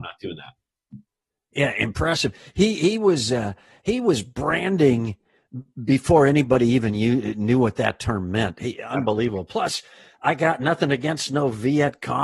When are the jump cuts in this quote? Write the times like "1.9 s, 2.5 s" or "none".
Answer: none